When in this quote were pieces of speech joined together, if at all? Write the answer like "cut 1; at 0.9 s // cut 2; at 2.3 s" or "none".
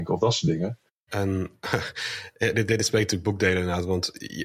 cut 1; at 1.1 s // cut 2; at 2.7 s